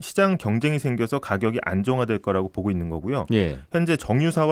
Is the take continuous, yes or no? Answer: yes